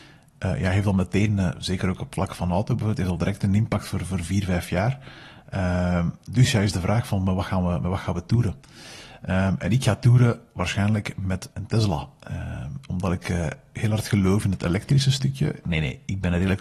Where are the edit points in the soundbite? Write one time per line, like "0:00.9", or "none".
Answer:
0:11.5
0:15.6